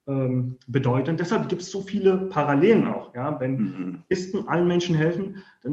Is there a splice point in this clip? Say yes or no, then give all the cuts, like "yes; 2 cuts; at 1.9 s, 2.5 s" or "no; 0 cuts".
no; 0 cuts